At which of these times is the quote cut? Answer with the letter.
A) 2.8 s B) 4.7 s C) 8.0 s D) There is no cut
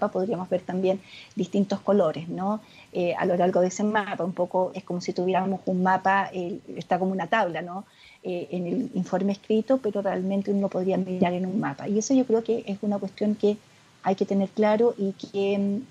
B